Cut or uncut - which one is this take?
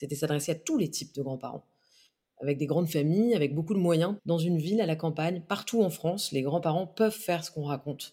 cut